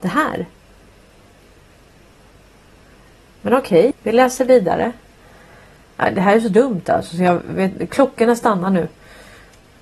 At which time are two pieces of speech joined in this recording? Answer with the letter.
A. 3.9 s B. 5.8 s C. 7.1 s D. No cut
A